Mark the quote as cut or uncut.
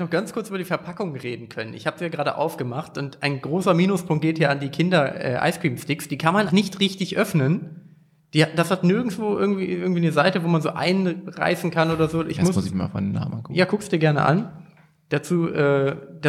cut